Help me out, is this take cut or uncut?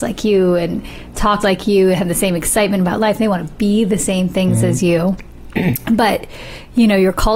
cut